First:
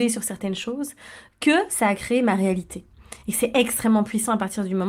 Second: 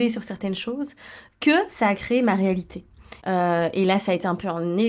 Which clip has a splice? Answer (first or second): second